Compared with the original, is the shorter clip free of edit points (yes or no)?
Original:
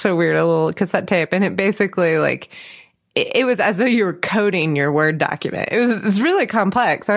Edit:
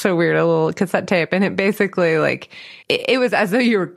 no